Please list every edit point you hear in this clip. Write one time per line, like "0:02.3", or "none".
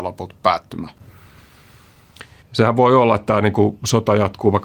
0:02.4